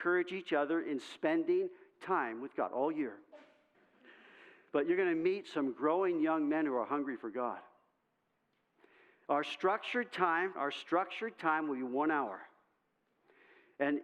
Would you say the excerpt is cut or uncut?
cut